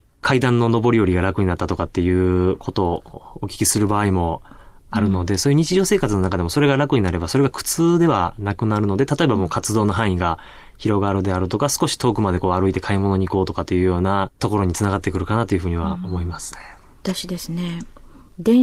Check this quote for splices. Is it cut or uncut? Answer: uncut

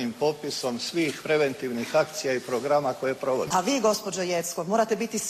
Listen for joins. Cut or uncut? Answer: uncut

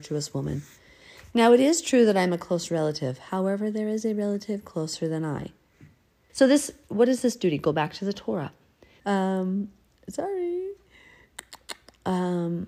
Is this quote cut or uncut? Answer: cut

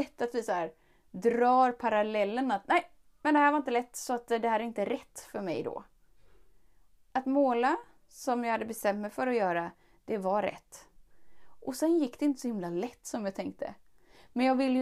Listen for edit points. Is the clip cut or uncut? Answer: cut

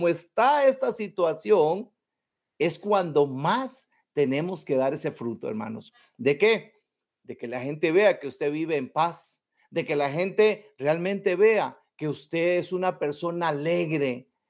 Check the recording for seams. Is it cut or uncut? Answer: uncut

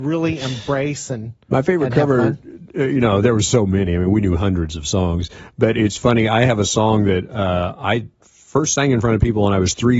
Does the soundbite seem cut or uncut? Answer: uncut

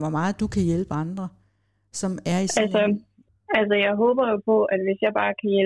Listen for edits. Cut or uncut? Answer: cut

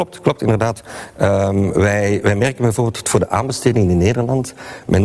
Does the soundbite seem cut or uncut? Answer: uncut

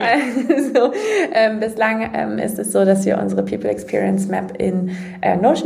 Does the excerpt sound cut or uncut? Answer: uncut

